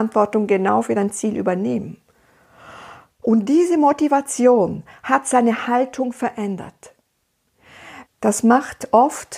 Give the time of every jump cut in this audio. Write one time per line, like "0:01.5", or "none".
0:03.2
0:08.1

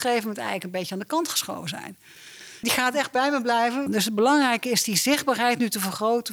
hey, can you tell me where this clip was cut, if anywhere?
0:02.6
0:03.9

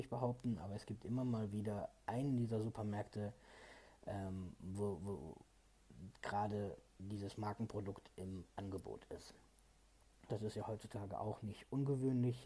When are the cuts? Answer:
0:10.3

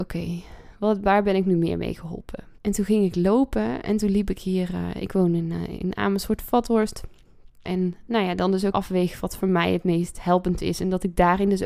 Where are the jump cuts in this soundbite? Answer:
0:02.6
0:07.7
0:08.7

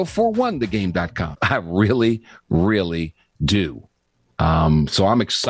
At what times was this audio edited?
0:01.3

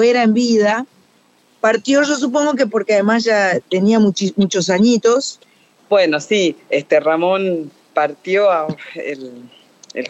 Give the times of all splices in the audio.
0:05.8

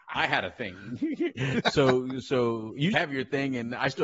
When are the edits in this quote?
0:01.6
0:02.9

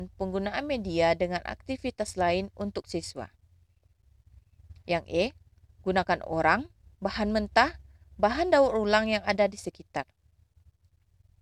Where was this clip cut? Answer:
none

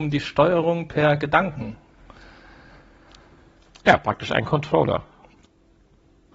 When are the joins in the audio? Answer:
none

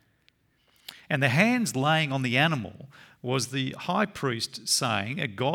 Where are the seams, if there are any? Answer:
none

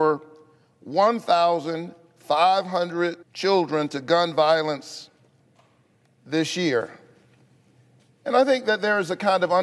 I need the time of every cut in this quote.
0:03.2

